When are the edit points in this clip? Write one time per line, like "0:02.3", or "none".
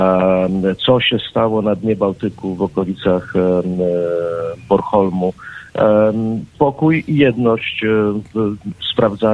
0:06.5